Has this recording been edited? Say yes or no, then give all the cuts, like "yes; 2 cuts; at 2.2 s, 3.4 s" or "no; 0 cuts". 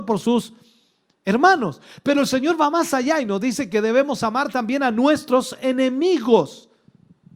no; 0 cuts